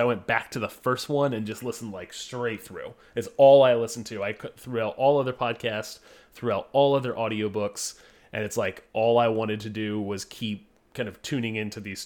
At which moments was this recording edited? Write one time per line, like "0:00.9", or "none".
none